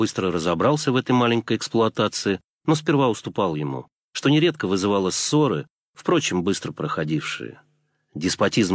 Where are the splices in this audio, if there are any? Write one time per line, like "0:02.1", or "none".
0:04.1